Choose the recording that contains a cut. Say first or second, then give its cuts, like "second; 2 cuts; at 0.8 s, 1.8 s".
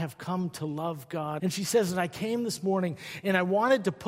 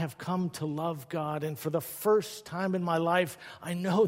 first; 1 cut; at 1.4 s